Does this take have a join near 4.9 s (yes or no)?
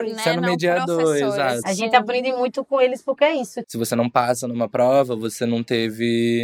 no